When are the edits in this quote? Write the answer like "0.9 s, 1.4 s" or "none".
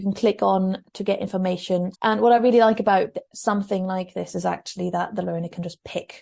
1.9 s